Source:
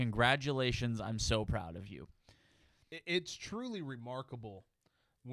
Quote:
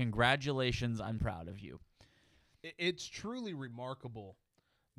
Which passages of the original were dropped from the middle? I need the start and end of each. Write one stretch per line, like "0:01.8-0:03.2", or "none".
0:01.2-0:01.5